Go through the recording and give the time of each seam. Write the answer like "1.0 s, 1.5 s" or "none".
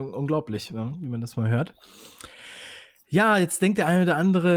none